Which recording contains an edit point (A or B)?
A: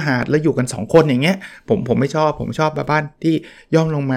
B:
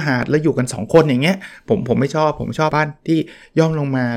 B